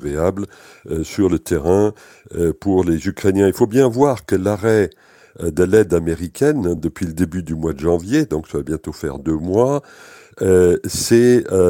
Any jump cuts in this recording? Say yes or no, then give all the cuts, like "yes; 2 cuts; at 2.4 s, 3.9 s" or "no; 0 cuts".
no; 0 cuts